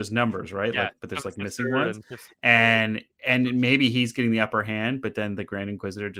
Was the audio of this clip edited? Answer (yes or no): no